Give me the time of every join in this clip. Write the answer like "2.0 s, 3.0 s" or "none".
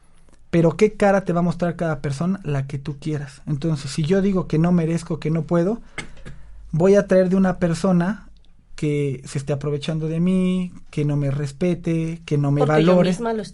none